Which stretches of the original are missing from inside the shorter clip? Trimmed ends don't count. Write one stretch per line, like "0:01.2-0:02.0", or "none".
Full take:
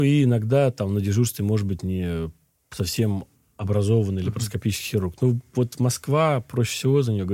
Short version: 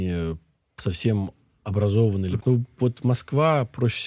0:04.3-0:05.2